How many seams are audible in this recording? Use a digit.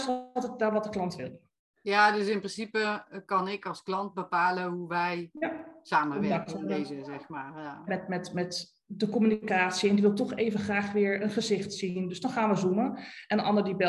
1